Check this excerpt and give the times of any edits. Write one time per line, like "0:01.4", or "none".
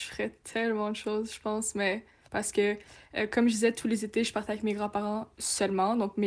0:02.3